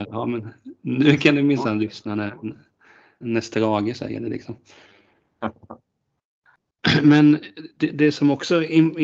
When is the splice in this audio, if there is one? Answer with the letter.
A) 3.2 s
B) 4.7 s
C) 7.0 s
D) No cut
A